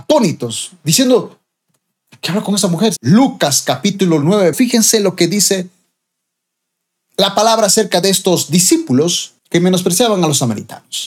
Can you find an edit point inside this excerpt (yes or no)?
yes